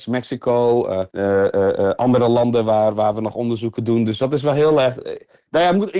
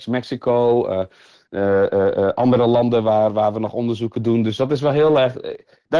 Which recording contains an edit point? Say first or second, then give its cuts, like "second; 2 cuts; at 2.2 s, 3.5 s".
first; 1 cut; at 1.1 s